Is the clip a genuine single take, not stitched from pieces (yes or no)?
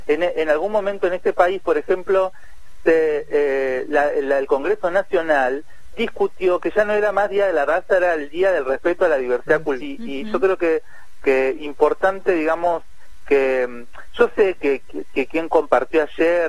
no